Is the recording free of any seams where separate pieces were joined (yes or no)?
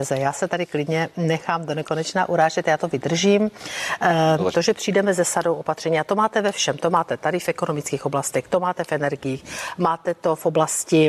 no